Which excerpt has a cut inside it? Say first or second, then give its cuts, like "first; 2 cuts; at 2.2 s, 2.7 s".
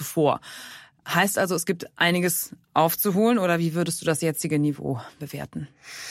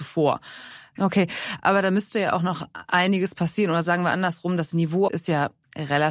second; 2 cuts; at 1.0 s, 5.1 s